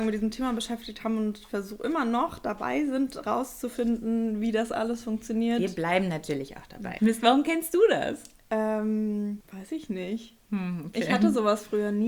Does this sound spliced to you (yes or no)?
yes